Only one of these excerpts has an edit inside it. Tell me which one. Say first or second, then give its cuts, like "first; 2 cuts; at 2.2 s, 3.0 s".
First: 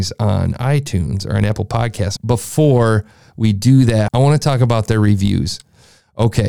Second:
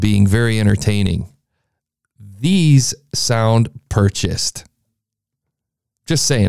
first; 2 cuts; at 2.2 s, 4.1 s